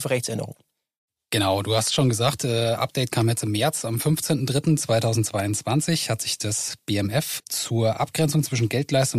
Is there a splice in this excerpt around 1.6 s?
no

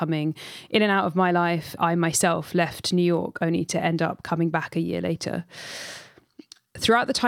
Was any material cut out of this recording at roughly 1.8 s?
yes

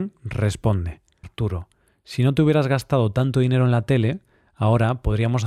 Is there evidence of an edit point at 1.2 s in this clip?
yes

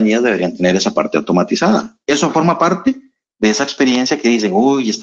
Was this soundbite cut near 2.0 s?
no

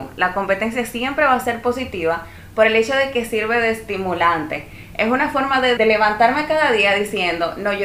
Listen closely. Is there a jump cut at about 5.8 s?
yes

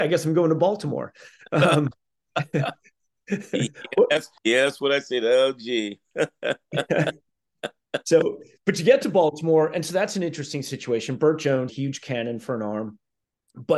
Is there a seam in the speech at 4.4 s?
yes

